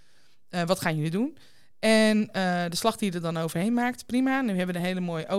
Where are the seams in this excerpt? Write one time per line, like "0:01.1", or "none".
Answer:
none